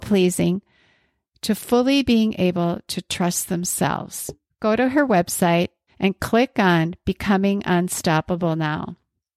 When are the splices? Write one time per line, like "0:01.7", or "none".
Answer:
0:04.5
0:05.9